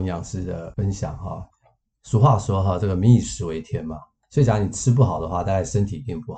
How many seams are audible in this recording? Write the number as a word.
zero